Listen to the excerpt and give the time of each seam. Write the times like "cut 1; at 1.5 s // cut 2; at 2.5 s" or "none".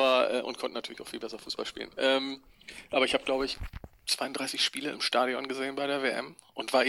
none